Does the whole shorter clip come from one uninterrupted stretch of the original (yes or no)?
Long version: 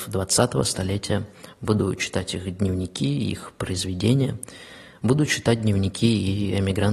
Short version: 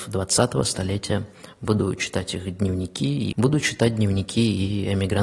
no